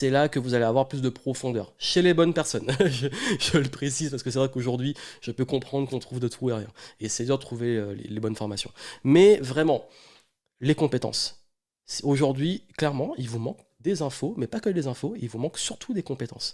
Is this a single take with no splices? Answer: yes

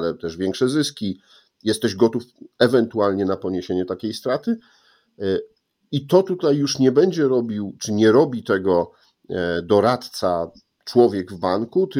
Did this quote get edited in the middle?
no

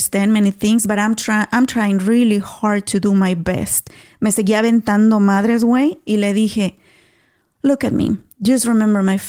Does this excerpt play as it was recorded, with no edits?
yes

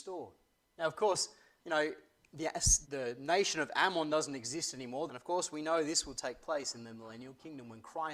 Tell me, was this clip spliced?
yes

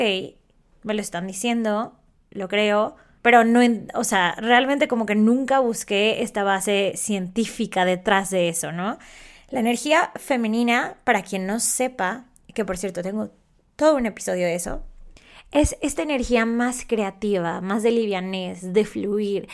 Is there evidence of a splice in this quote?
yes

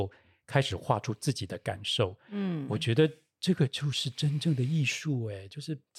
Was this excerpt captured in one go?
yes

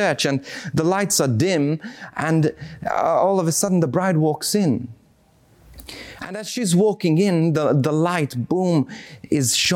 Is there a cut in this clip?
no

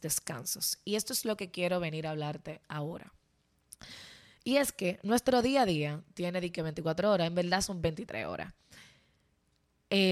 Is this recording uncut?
yes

